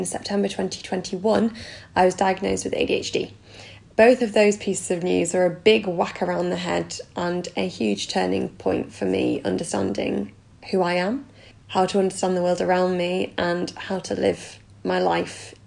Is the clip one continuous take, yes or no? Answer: no